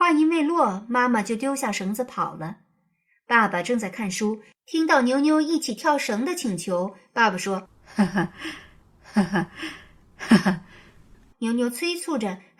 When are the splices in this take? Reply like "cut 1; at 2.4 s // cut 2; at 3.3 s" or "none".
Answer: none